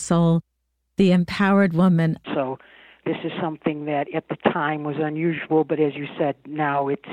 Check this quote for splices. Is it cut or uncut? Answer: cut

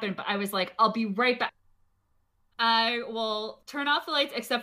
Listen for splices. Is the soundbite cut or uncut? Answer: cut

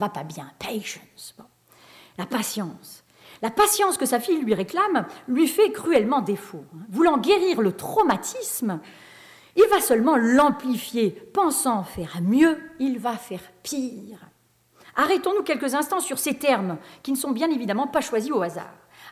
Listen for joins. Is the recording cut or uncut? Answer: uncut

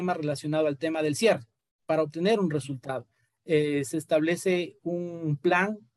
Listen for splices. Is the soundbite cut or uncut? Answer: cut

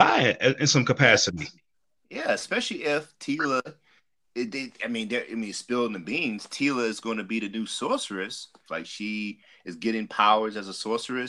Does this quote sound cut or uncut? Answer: cut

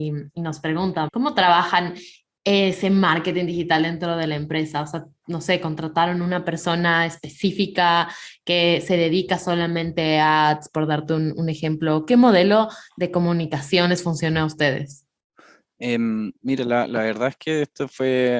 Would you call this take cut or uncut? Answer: cut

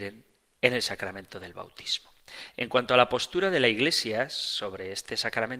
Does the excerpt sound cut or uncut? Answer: uncut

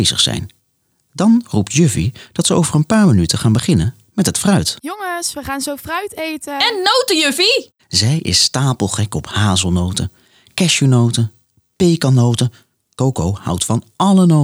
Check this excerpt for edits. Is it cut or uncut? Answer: cut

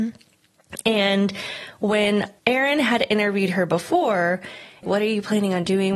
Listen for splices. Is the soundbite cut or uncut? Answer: cut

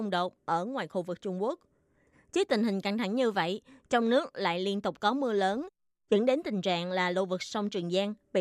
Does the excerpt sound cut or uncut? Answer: cut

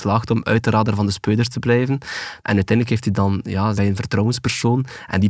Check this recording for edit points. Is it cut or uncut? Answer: cut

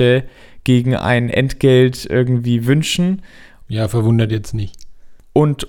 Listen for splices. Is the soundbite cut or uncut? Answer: cut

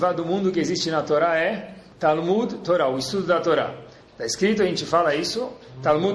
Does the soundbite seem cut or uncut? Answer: uncut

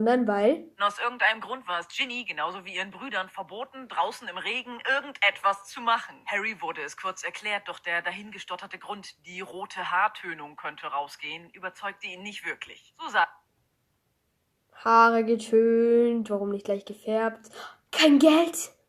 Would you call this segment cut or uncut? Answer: uncut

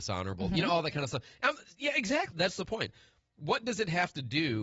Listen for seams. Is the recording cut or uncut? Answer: cut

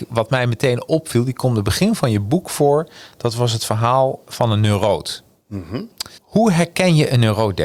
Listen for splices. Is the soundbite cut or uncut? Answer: cut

